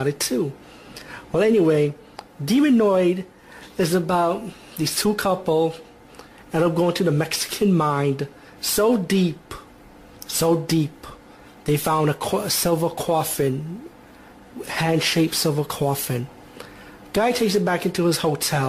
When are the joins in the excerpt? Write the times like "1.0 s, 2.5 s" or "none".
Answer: none